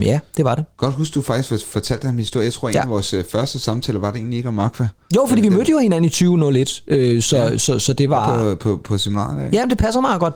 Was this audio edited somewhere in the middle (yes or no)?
no